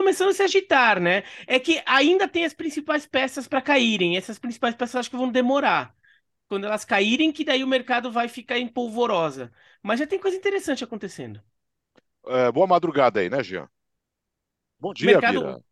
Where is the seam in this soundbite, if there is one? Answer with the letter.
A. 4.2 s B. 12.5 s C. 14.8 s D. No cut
C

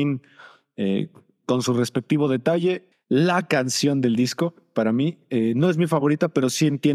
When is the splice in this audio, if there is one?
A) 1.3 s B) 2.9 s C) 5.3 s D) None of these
B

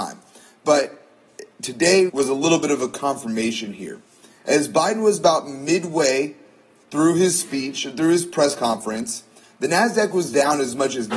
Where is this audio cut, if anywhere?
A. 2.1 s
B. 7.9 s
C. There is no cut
A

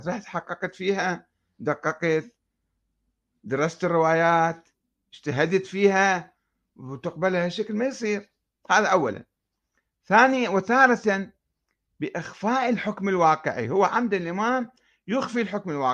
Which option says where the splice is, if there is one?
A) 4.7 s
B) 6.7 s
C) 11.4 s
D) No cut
D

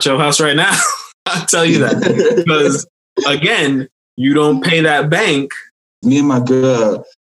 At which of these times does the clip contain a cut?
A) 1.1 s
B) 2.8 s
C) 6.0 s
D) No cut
C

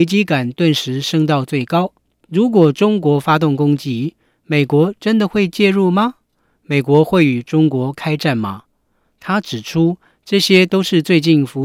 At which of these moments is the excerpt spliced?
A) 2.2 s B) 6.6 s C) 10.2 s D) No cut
A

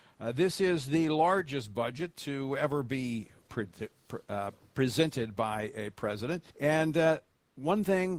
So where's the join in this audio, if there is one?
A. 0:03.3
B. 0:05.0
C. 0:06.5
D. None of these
C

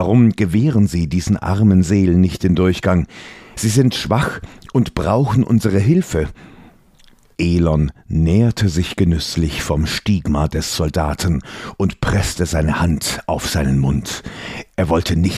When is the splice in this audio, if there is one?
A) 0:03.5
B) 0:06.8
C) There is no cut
A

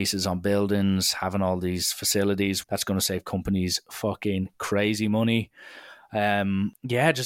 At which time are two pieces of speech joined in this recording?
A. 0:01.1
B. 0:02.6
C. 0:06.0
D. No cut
B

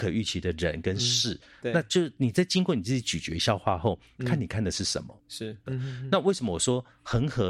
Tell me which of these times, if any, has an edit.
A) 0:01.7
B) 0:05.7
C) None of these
B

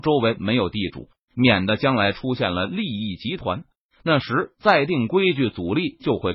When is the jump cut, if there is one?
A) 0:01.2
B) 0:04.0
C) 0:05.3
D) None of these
A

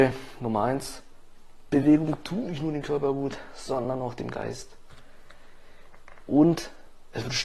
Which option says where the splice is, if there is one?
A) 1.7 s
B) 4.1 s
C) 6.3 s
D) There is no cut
A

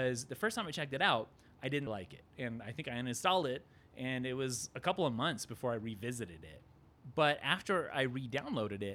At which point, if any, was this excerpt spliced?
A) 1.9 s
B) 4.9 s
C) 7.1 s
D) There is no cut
A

